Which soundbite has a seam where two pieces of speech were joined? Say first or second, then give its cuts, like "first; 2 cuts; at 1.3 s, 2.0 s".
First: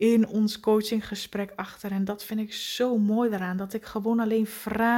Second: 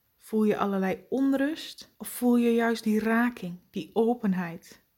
second; 1 cut; at 1.9 s